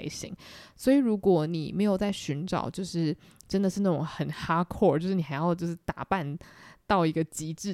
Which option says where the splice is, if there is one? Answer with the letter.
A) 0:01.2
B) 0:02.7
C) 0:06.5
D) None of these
D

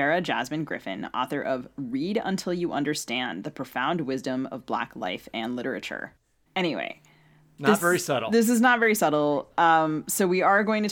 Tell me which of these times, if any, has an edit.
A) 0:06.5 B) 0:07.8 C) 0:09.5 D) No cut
A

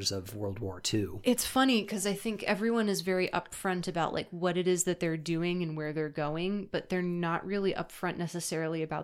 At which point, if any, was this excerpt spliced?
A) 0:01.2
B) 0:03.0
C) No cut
C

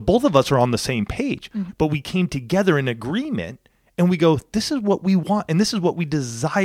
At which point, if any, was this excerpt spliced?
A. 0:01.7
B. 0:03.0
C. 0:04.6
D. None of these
A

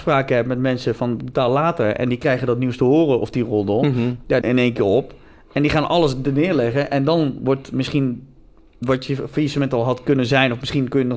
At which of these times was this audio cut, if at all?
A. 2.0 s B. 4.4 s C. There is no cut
B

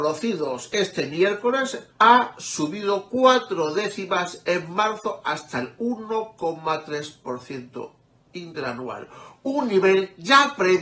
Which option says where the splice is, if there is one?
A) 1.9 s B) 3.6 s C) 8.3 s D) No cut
A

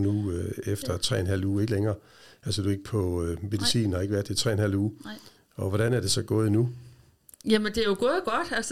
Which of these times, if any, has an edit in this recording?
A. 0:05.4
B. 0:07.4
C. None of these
C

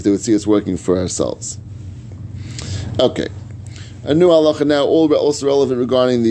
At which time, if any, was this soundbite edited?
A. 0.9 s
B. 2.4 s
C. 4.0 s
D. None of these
D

